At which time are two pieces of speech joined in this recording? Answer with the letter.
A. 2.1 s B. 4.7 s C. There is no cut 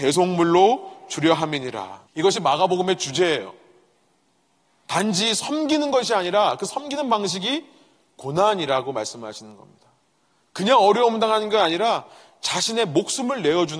A